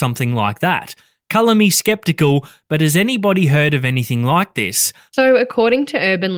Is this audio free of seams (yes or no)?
no